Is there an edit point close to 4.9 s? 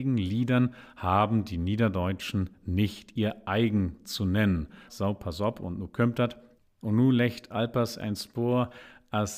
yes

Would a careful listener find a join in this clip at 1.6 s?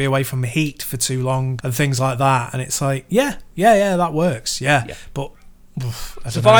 yes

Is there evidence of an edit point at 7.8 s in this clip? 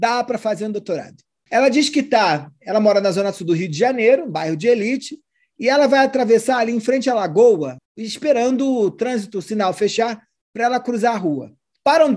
yes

